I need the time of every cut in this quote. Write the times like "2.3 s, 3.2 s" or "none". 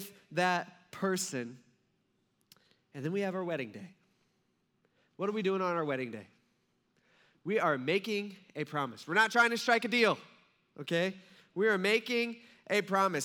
none